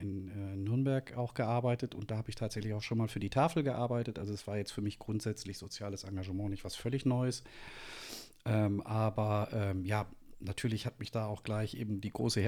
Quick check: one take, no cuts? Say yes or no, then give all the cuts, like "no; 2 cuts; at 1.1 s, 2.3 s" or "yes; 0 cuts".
yes; 0 cuts